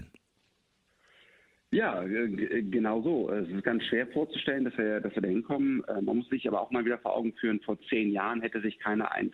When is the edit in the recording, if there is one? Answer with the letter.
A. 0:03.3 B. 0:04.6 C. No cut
C